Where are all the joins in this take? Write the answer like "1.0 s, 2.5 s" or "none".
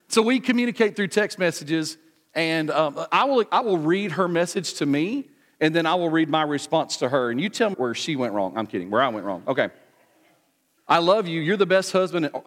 7.7 s, 10.8 s